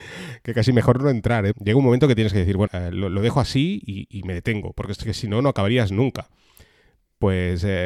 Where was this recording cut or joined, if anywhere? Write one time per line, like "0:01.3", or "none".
0:01.5
0:02.7